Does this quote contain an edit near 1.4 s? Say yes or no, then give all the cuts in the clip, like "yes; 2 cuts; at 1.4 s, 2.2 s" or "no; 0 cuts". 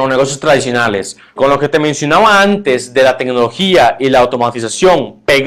yes; 1 cut; at 1.4 s